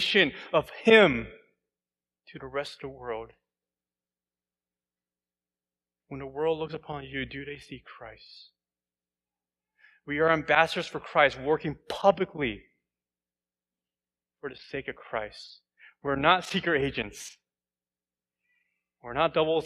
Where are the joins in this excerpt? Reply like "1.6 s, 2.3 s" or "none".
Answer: none